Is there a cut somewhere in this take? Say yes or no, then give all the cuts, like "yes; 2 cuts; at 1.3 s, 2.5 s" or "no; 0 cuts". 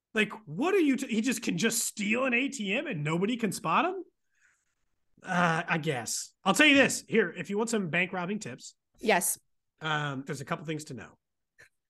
yes; 2 cuts; at 6.4 s, 10.3 s